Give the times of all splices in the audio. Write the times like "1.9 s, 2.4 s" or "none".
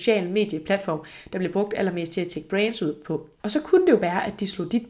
3.4 s